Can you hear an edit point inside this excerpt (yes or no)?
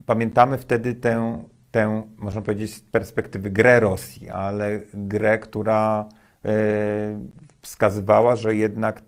no